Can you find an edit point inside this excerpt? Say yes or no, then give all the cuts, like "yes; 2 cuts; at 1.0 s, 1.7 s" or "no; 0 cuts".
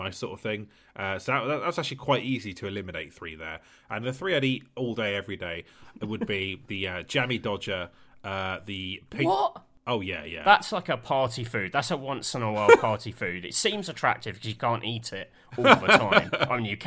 no; 0 cuts